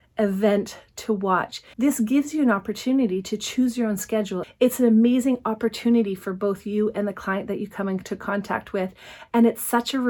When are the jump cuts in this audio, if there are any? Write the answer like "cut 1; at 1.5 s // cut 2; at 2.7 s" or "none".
cut 1; at 1.7 s // cut 2; at 4.4 s

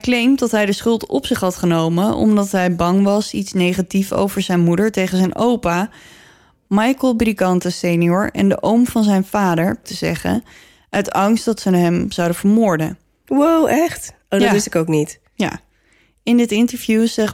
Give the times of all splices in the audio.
cut 1; at 9.8 s // cut 2; at 13.2 s // cut 3; at 15.3 s

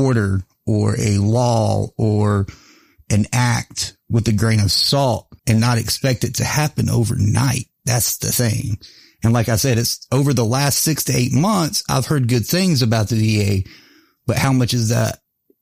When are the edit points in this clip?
cut 1; at 5.4 s

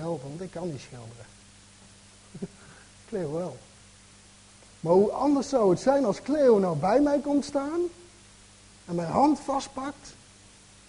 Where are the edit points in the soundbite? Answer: none

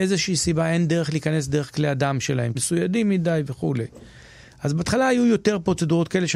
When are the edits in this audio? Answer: cut 1; at 2.5 s

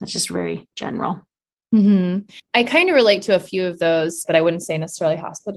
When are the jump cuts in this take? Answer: cut 1; at 4.2 s

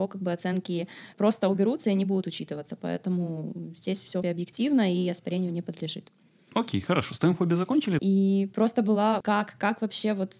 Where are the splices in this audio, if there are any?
cut 1; at 4.2 s // cut 2; at 8.0 s // cut 3; at 9.2 s

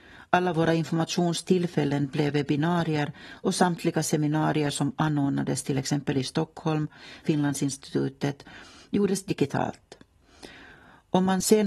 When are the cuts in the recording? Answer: cut 1; at 7.2 s

